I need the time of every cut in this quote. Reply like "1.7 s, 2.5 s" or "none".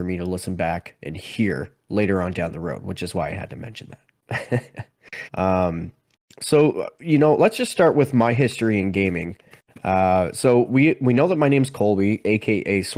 5.3 s